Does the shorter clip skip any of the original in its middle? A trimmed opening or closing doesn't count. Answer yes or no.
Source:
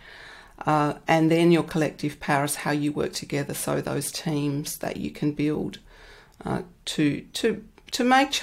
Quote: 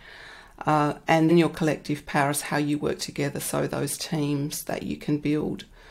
yes